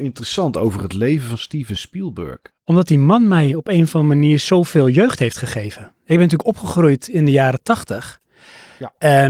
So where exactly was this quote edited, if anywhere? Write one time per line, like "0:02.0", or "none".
none